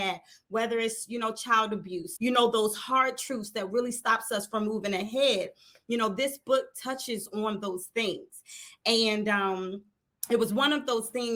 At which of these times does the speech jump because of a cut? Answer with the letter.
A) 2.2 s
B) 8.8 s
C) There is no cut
A